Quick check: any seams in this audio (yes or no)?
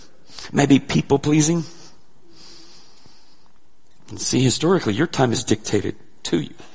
no